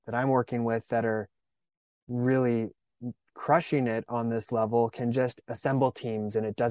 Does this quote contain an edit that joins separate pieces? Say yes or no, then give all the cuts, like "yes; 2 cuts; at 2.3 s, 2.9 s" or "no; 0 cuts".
no; 0 cuts